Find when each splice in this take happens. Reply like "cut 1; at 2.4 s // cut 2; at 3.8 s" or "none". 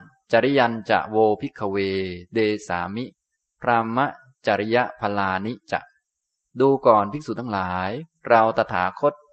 cut 1; at 2.7 s